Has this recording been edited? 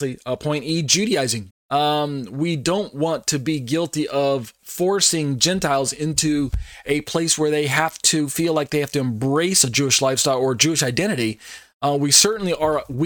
yes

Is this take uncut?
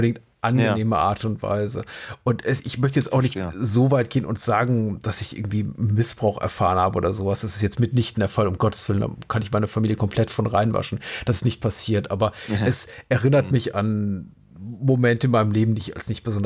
yes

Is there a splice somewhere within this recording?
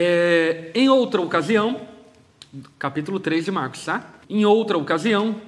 yes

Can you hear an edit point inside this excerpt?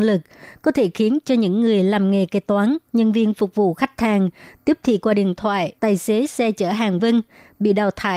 yes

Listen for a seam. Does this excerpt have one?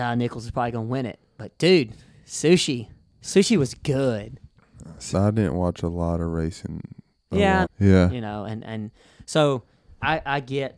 yes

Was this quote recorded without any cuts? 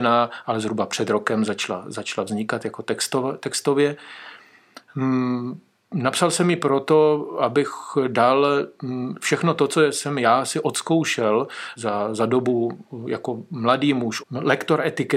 no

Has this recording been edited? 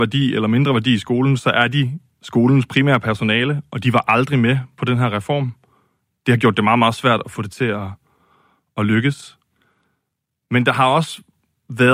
no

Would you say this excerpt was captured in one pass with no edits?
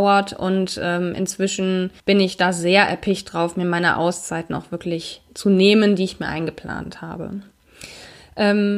no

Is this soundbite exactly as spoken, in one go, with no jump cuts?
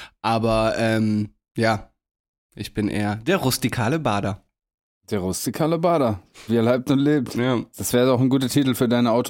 yes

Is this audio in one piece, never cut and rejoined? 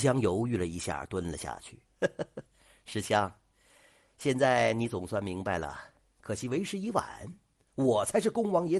no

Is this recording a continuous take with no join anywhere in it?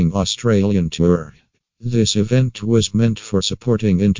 no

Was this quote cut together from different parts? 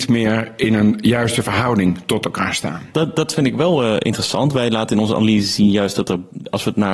no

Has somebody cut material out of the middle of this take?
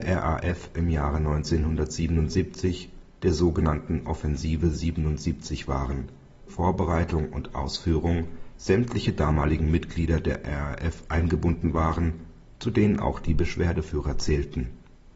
yes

